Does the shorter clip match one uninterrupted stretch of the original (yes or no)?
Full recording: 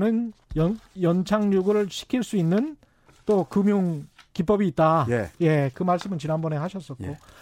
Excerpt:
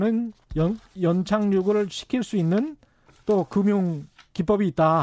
yes